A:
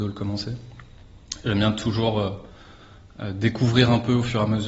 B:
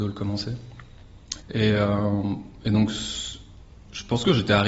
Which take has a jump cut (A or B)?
B